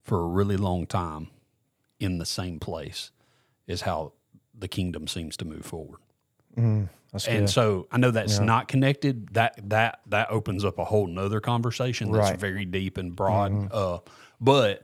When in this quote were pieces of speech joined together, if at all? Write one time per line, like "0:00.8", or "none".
none

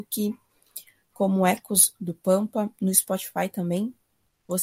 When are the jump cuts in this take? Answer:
none

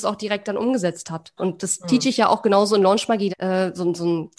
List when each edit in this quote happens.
0:01.4
0:03.3

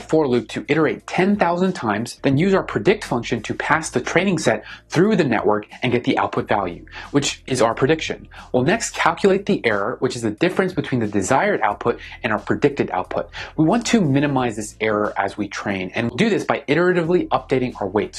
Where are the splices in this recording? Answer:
0:02.2

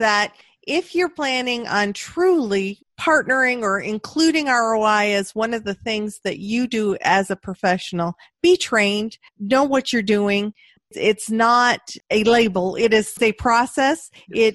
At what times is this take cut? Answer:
0:12.0

